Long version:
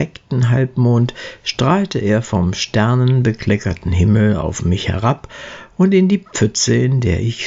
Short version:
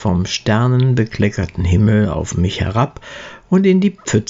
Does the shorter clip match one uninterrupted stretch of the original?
yes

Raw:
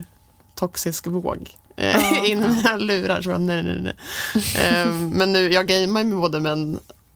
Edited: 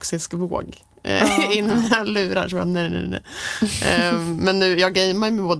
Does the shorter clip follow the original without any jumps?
yes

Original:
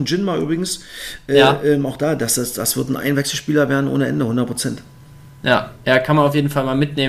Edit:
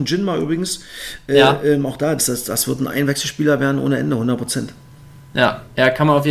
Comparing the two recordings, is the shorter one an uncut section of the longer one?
no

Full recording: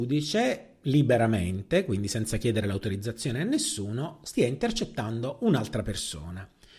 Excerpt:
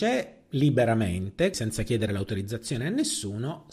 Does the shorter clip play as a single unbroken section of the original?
no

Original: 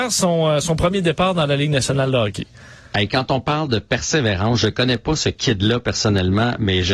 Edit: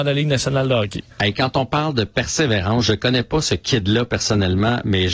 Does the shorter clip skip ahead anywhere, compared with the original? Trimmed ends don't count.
yes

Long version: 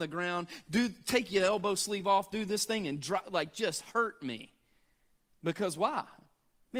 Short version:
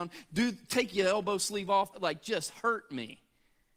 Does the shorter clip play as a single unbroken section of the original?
no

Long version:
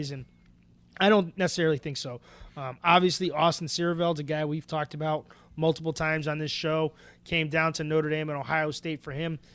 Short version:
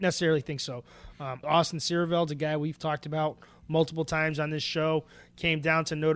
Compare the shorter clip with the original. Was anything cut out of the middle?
yes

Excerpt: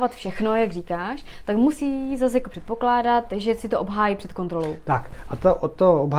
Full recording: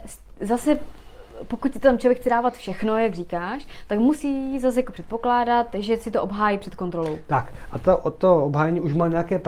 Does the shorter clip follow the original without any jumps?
yes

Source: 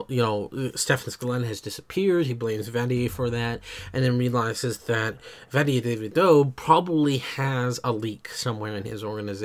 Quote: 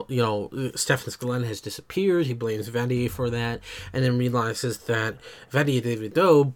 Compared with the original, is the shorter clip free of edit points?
yes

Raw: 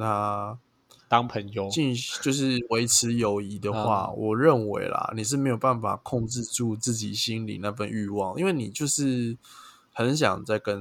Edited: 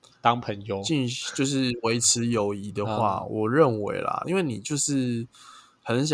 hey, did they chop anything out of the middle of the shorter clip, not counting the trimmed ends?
yes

